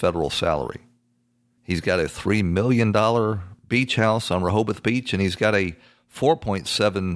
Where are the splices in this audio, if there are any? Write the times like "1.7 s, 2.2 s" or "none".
1.6 s